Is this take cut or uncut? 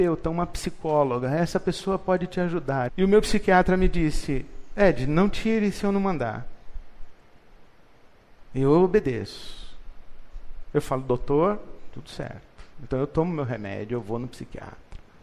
cut